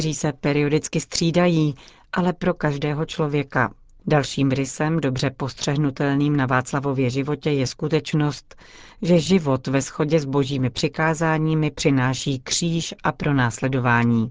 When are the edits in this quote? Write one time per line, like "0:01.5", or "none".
none